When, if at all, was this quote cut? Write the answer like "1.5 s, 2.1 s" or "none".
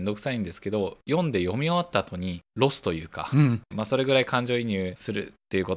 2.5 s, 3.7 s